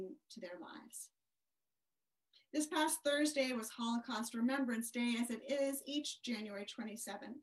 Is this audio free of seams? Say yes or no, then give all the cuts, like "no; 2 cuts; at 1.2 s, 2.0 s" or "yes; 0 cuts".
yes; 0 cuts